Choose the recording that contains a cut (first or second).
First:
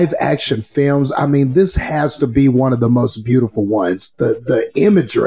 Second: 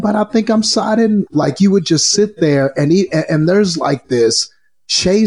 second